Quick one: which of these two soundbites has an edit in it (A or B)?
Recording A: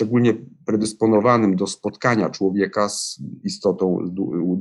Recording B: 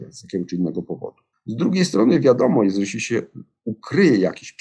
B